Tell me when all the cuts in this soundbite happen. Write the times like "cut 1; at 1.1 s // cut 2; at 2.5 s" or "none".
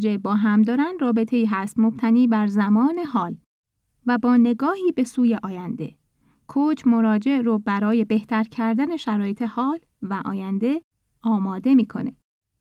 none